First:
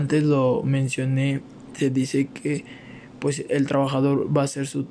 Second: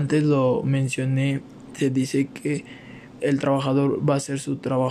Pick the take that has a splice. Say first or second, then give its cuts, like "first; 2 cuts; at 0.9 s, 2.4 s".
second; 1 cut; at 3.2 s